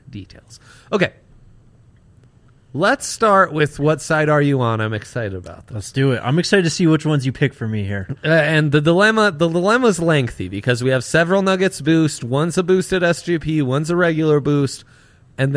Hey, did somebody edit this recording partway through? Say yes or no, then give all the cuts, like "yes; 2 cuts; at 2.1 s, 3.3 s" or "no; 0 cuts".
no; 0 cuts